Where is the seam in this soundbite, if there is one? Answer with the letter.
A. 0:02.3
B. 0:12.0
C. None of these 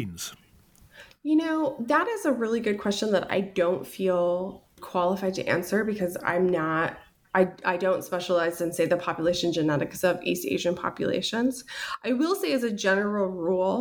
C